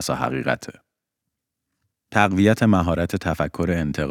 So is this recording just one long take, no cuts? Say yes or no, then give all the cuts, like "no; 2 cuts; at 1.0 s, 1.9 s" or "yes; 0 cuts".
no; 1 cut; at 1.9 s